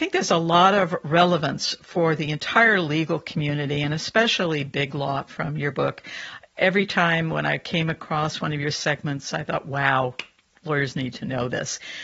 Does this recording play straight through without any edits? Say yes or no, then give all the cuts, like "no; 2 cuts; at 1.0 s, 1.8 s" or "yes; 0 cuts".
yes; 0 cuts